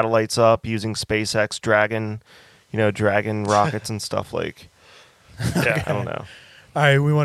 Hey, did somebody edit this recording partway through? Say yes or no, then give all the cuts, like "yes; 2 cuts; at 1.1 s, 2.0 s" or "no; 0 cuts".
no; 0 cuts